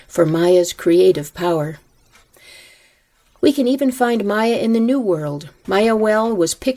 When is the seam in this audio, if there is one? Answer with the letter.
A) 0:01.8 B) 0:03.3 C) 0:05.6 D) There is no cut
C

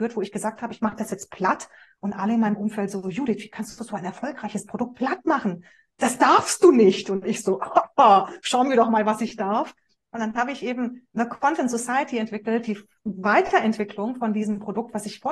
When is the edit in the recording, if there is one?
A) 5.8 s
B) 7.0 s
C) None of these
C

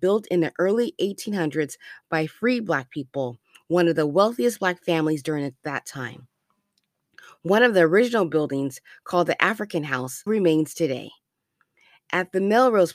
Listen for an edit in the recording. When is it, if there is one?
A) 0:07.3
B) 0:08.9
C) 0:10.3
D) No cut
C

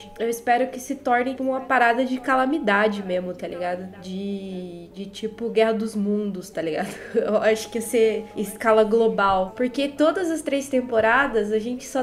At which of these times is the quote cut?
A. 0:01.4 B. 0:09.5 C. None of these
A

